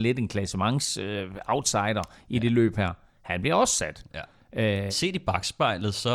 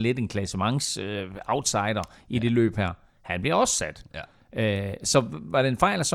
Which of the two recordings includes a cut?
first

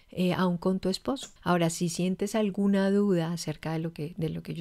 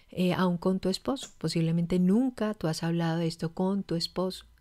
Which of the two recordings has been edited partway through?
first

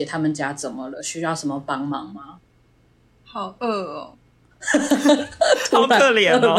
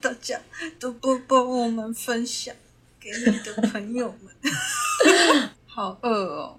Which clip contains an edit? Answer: second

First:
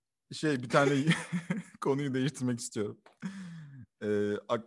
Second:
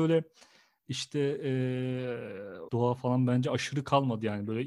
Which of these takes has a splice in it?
second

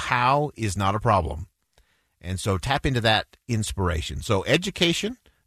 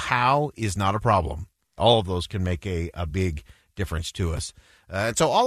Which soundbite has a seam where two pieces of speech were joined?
second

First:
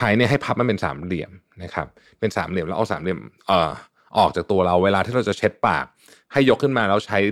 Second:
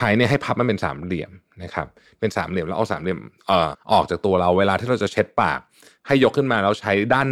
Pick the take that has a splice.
second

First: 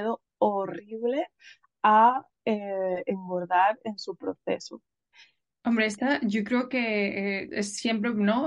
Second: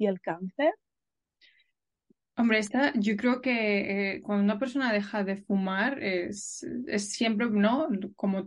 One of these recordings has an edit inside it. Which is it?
first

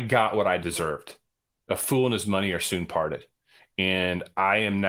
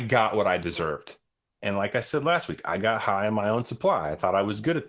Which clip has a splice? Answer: second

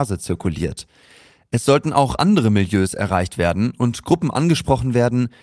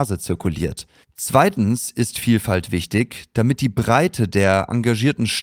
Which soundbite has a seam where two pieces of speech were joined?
second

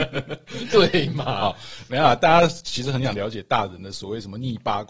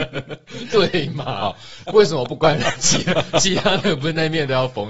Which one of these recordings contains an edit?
second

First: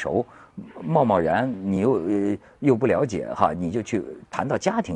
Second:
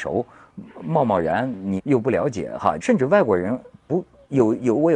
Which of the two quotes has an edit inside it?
second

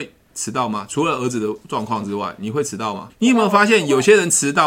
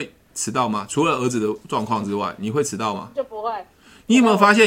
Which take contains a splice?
first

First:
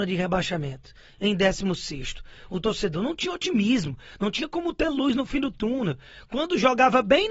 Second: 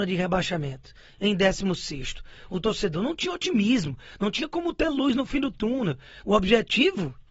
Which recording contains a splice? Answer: second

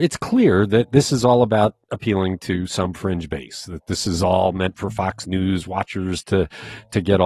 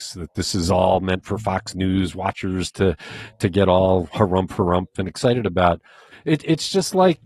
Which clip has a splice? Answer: second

